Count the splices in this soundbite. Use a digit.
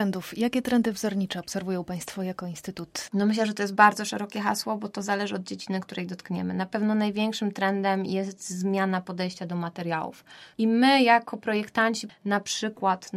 2